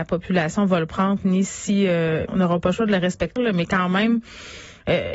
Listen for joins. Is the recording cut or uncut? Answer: cut